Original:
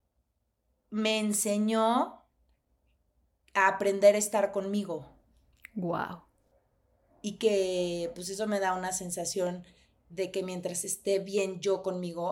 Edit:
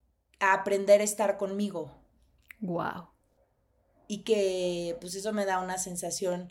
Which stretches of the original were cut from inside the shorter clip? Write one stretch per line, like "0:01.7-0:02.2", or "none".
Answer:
none